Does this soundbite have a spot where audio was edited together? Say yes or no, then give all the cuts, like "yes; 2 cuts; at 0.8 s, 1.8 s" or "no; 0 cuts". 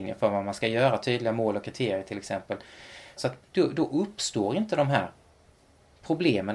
yes; 1 cut; at 3.2 s